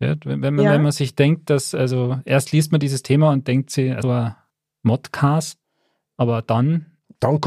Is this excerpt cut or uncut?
cut